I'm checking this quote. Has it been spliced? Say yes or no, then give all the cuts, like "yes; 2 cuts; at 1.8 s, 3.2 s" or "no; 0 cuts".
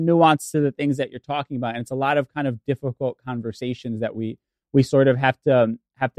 no; 0 cuts